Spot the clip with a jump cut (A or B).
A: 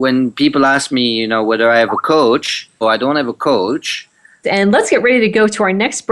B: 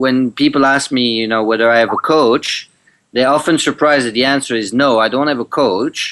A